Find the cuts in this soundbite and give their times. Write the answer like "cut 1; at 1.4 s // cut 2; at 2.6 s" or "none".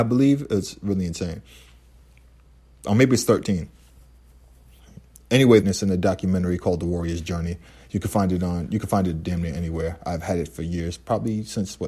cut 1; at 5.6 s